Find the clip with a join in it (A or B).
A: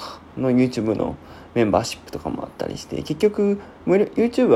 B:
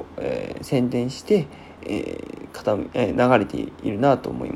B